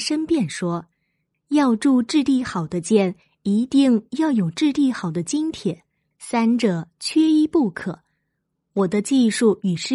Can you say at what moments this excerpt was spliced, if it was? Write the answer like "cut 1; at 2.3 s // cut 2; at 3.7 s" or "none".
cut 1; at 6.1 s